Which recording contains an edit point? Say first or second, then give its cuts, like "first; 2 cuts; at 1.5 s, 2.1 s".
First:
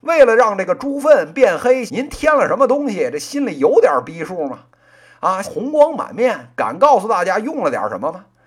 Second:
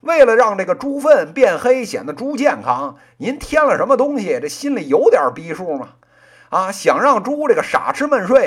first; 2 cuts; at 1.9 s, 5.4 s